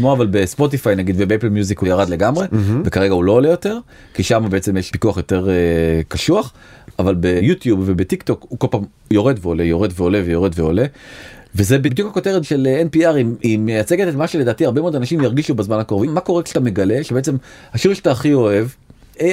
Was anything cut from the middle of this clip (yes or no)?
no